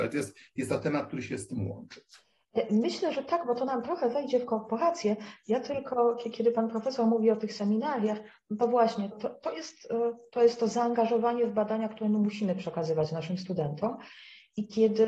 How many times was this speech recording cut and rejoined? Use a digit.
1